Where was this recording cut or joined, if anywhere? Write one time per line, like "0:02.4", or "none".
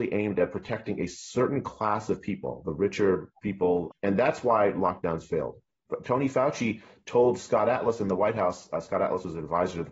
0:03.9
0:05.9